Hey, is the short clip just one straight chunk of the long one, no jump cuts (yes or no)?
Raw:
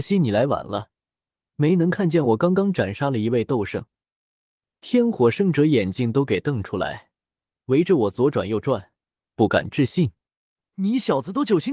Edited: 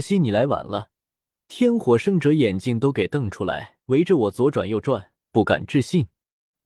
no